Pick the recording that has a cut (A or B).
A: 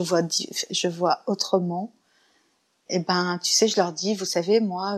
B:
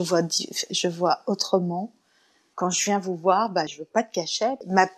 B